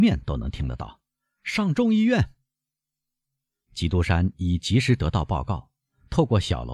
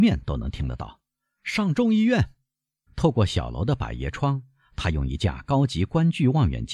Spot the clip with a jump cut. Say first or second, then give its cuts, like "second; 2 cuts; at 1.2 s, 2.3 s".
second; 1 cut; at 2.9 s